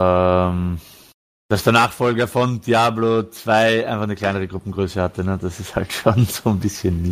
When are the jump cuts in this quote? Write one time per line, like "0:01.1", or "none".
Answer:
0:01.5